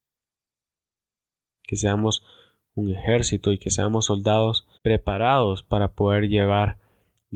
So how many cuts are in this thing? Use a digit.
2